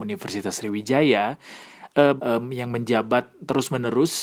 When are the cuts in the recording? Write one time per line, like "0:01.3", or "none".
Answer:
0:02.2